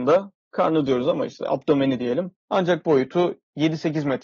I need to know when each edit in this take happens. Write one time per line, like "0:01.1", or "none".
0:02.3

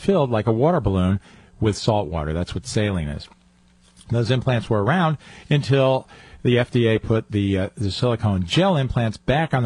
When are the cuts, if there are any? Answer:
none

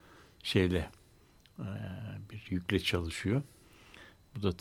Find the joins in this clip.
none

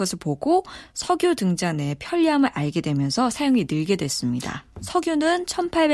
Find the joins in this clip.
0:04.8

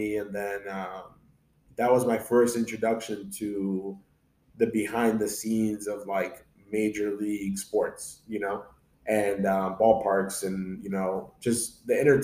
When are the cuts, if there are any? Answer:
none

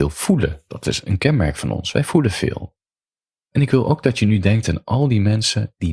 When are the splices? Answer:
none

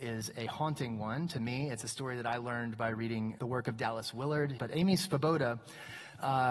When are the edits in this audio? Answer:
0:03.4
0:04.6

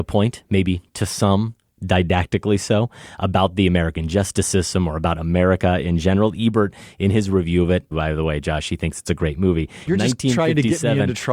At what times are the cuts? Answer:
0:07.9
0:09.9

